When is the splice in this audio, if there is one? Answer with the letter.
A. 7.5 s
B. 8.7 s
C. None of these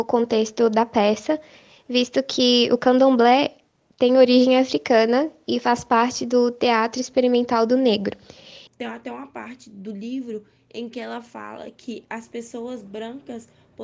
B